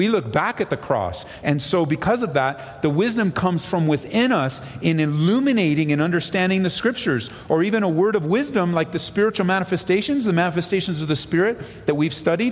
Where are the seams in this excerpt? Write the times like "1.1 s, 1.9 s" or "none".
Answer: 1.4 s